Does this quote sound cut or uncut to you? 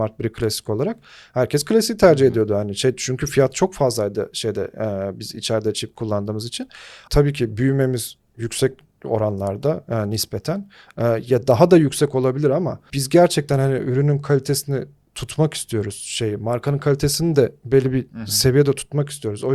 cut